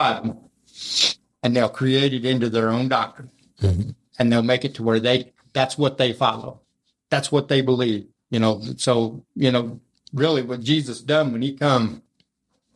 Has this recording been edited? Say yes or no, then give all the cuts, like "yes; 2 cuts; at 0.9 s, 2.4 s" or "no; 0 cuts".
yes; 1 cut; at 8.1 s